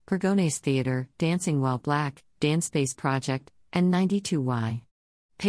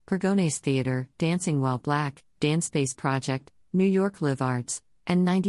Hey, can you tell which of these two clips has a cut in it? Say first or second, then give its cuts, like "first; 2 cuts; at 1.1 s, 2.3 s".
first; 1 cut; at 3.7 s